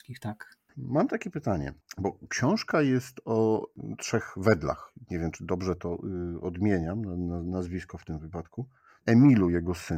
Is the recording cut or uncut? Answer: cut